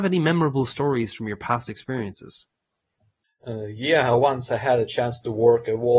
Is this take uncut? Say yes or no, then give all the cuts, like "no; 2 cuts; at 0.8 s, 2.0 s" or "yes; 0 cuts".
no; 1 cut; at 3.4 s